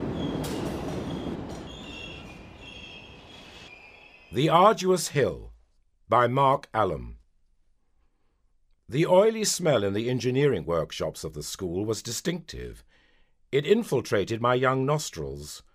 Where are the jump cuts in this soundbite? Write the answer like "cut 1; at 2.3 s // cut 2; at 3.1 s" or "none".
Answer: none